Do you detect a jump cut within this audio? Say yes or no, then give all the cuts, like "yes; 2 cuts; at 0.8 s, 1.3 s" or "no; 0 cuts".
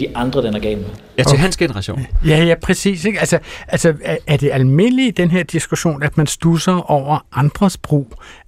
no; 0 cuts